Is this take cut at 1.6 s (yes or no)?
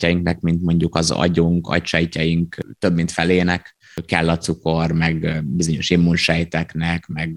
no